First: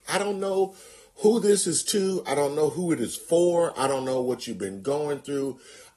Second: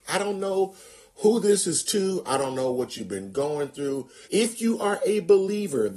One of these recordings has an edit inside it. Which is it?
second; 2 cuts; at 2.2 s, 4.2 s

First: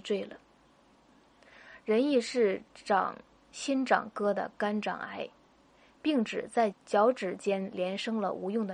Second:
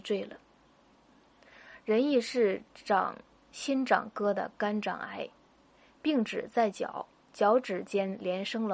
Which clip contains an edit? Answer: first; 1 cut; at 6.7 s

